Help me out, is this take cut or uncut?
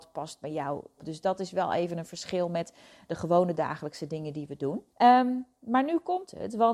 cut